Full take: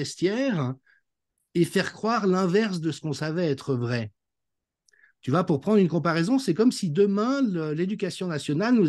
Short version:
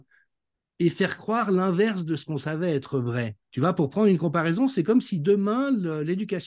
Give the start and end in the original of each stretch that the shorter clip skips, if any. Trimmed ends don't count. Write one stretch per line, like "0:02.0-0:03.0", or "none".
0:04.2-0:05.1